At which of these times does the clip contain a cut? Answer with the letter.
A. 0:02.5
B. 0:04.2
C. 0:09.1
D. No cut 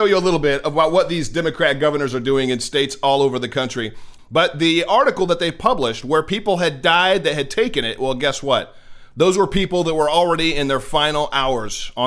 B